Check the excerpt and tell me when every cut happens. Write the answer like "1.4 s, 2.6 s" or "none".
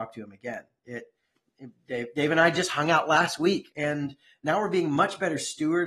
3.7 s